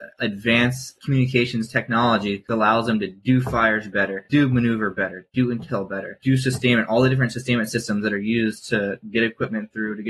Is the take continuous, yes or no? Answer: yes